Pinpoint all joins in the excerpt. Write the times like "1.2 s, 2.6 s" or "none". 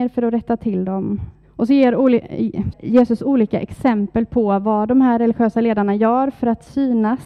1.4 s, 2.7 s